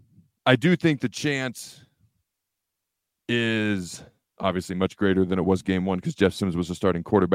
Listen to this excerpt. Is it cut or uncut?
uncut